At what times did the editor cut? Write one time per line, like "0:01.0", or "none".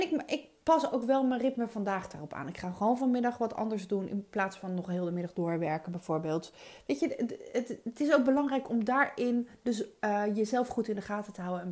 none